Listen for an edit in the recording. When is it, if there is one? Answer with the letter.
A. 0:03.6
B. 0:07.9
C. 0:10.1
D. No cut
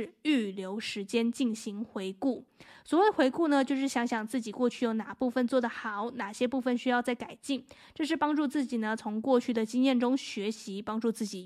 D